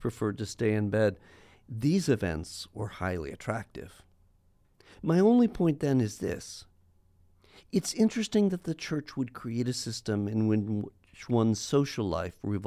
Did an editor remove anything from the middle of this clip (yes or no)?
no